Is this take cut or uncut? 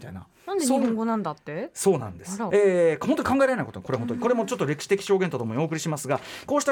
cut